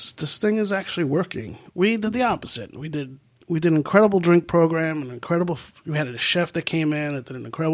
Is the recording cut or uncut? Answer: cut